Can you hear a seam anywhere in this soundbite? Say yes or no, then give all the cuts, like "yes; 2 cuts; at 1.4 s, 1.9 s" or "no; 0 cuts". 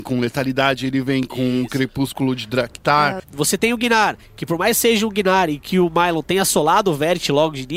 yes; 1 cut; at 3.2 s